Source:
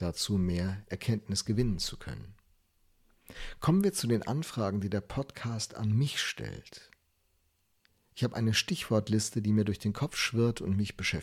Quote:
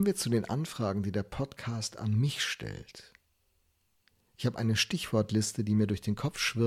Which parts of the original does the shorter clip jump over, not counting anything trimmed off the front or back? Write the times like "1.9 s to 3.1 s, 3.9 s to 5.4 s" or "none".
none